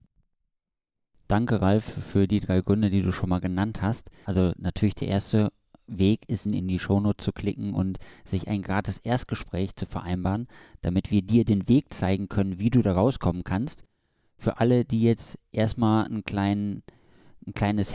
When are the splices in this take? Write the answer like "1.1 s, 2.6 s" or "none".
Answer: 4.3 s, 6.5 s